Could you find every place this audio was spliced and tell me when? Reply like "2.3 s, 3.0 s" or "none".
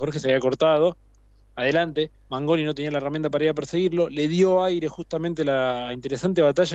none